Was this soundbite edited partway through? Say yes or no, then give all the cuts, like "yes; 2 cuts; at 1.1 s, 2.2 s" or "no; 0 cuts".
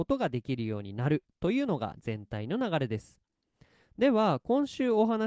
no; 0 cuts